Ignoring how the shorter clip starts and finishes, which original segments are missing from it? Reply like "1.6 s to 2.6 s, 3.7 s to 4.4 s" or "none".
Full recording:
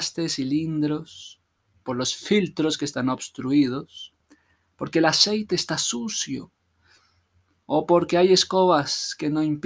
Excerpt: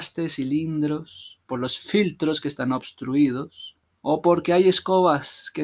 1.4 s to 1.8 s, 4.3 s to 7.5 s